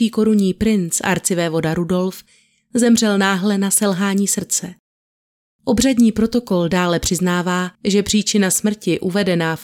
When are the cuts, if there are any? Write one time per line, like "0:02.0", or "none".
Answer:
0:05.5
0:07.7